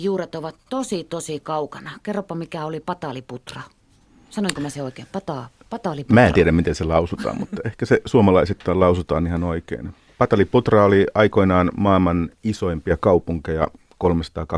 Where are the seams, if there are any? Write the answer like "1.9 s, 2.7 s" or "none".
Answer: none